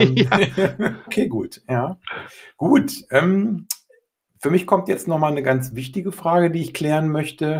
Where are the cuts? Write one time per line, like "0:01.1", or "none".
0:01.1